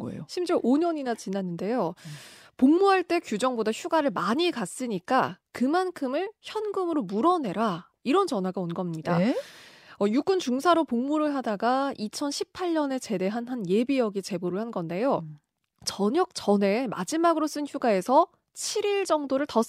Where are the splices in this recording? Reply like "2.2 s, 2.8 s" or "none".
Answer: none